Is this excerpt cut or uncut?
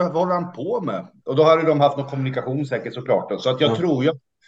uncut